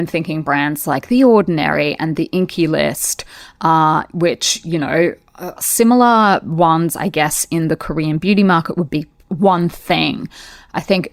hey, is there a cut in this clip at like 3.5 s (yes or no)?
no